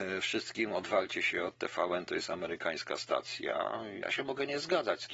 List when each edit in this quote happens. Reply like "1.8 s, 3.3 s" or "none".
4.0 s